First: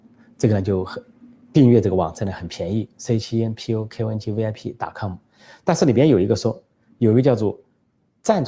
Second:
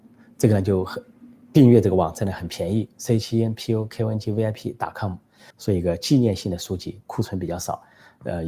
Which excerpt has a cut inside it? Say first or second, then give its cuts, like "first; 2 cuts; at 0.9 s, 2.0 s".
second; 2 cuts; at 5.5 s, 7.0 s